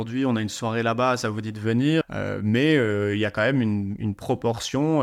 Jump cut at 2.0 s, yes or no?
yes